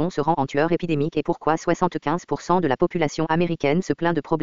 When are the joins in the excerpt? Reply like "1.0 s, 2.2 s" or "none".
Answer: none